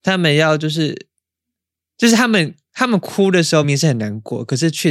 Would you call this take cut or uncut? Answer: cut